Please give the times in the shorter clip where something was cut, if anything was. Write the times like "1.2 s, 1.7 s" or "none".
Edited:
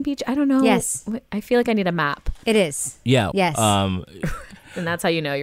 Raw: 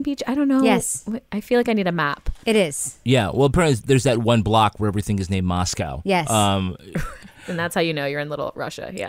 3.3 s